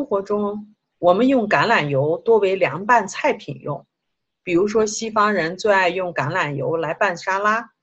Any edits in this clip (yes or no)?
no